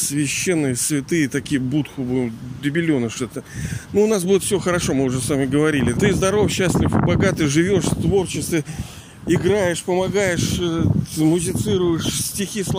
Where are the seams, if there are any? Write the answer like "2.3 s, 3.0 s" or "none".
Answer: 5.9 s